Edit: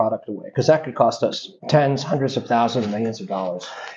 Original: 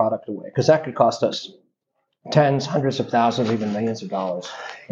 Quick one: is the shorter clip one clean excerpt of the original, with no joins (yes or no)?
no